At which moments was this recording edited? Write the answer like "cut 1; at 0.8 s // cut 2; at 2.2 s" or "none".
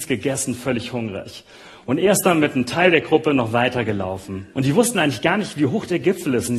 cut 1; at 4.5 s